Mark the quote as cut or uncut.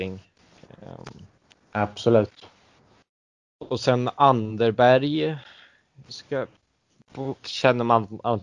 uncut